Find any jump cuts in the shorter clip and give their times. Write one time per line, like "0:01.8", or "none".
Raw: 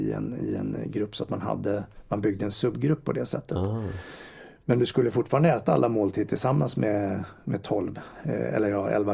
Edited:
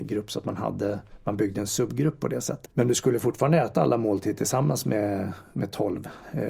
0:02.7

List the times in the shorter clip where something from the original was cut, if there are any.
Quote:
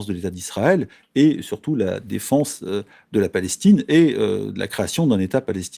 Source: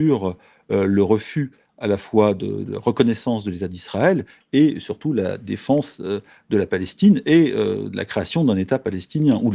none

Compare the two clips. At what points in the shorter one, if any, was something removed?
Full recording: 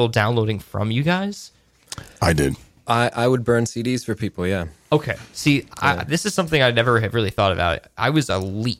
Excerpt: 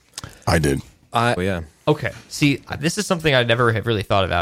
0:01.4
0:02.7

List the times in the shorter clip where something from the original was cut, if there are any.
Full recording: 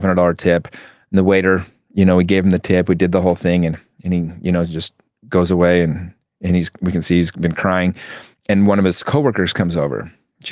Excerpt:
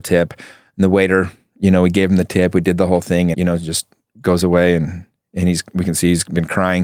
0:03.3

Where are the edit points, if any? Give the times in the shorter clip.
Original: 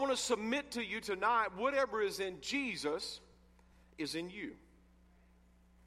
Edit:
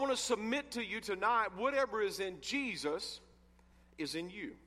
none

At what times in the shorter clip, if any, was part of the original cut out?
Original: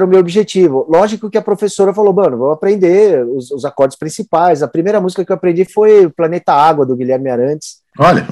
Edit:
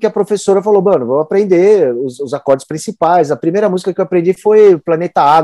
none

